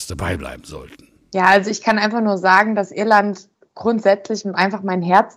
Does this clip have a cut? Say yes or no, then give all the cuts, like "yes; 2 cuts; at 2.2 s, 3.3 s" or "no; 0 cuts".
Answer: no; 0 cuts